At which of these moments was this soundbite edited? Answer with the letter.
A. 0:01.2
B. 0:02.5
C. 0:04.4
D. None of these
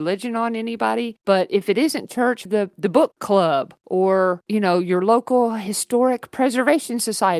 B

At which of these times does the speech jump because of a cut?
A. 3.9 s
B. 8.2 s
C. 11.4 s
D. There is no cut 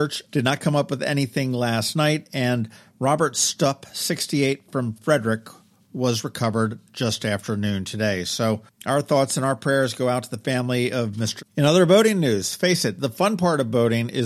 C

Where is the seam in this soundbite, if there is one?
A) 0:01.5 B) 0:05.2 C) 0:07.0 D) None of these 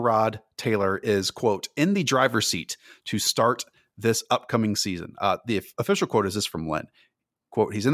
D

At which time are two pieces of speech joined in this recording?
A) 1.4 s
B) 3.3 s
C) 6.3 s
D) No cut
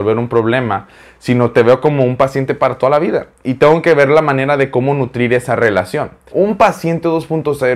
C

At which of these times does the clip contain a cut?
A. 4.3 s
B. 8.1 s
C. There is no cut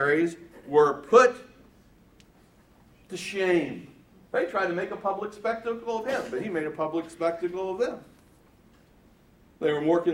A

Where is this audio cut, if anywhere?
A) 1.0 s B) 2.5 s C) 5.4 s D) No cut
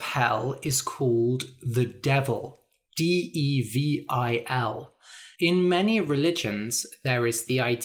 C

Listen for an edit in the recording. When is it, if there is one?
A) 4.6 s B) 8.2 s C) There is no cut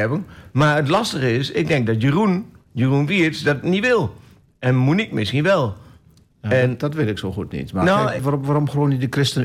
B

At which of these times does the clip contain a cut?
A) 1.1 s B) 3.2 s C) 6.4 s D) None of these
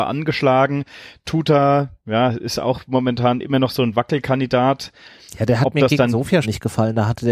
C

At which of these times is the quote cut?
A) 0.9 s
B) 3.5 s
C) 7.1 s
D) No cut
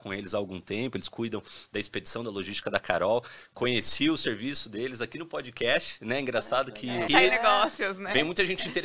C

